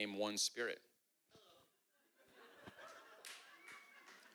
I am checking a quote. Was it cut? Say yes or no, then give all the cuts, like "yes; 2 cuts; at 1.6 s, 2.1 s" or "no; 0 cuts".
yes; 1 cut; at 1.3 s